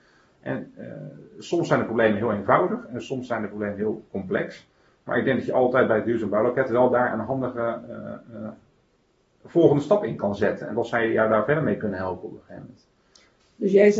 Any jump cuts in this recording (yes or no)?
no